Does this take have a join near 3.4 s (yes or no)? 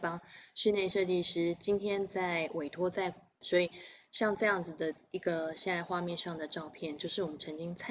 yes